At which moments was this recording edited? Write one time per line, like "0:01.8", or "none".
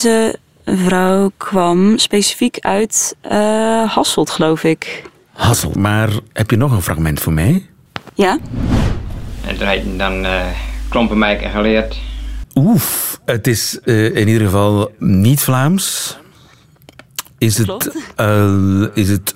0:05.8
0:12.4
0:15.0